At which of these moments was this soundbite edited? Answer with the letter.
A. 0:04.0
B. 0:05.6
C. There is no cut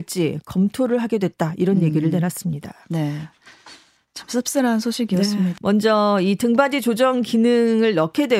B